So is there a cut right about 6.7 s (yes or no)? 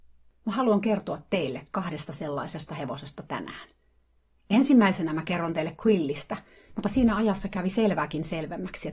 yes